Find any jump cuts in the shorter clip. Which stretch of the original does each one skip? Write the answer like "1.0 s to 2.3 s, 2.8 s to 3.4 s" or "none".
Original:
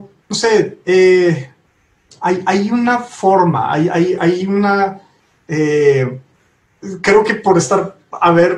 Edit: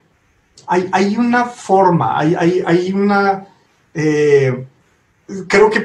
none